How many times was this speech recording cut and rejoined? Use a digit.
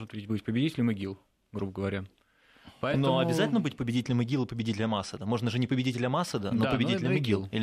0